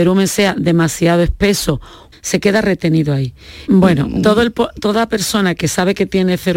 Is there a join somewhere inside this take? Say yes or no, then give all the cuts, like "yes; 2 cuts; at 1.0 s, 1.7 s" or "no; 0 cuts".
yes; 2 cuts; at 2.1 s, 3.7 s